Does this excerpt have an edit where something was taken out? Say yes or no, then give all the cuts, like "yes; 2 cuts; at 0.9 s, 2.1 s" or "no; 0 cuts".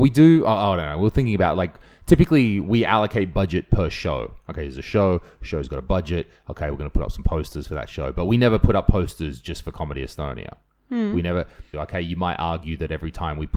yes; 1 cut; at 11.7 s